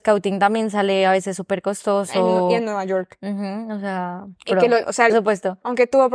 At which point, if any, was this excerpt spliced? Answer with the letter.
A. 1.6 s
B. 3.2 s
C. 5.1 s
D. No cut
C